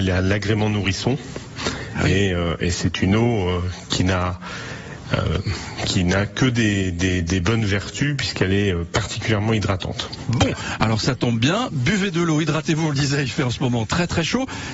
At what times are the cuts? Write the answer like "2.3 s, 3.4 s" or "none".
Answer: none